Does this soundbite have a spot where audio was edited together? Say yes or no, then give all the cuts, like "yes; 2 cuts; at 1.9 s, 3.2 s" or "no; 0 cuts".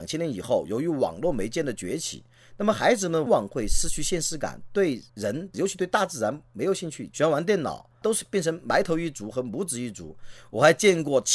yes; 2 cuts; at 3.3 s, 7.1 s